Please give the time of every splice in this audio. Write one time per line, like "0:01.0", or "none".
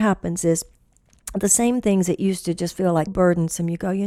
0:03.1